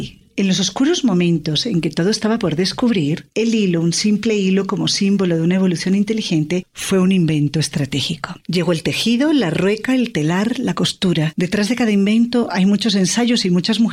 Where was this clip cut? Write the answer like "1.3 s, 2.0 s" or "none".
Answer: 8.4 s